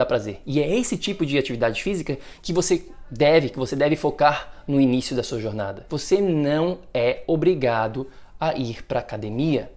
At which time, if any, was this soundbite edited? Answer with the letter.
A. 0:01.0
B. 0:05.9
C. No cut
B